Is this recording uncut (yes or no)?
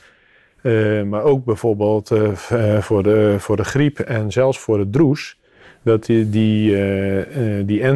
yes